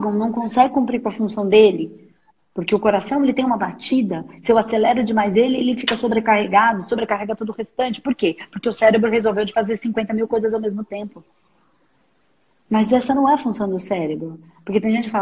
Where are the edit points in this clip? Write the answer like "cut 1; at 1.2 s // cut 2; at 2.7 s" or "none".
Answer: none